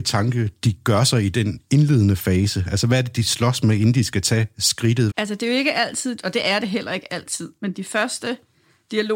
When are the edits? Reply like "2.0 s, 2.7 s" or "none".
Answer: 5.1 s, 6.2 s